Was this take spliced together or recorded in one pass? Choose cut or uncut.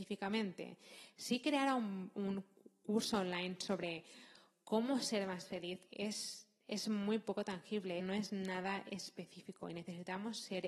cut